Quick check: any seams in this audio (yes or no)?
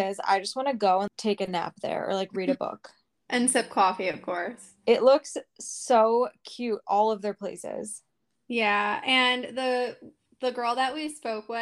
no